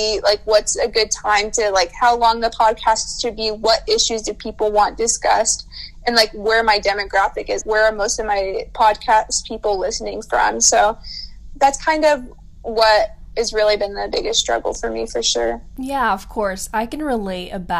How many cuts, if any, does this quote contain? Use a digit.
1